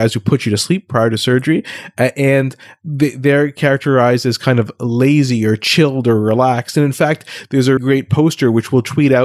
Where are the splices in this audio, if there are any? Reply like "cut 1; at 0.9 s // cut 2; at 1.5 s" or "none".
cut 1; at 7.8 s